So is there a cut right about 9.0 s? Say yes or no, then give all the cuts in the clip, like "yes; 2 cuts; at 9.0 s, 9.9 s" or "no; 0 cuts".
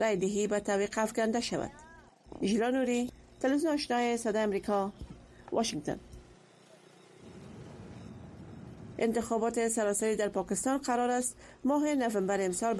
yes; 1 cut; at 9.0 s